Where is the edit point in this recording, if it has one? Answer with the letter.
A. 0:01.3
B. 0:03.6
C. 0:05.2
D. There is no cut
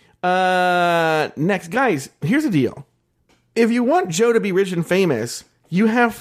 D